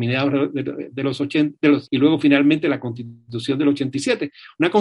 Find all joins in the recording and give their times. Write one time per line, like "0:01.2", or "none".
0:01.9